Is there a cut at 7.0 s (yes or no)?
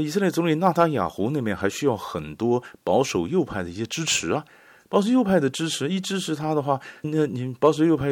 yes